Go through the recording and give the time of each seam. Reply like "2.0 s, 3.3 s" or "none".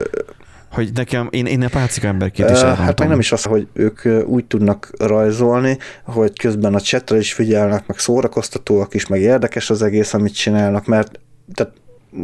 3.5 s, 10.8 s